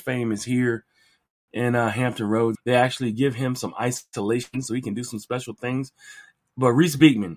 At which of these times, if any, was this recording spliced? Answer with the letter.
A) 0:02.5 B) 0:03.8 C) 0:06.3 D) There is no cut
A